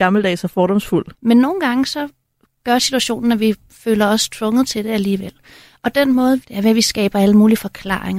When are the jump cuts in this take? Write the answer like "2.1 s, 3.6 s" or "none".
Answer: 1.1 s, 6.4 s